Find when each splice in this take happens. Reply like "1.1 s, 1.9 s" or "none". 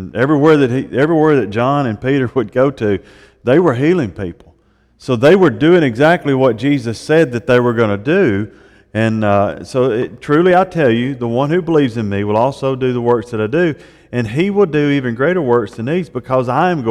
none